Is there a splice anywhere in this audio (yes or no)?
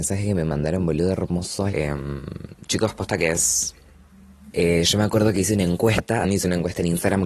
yes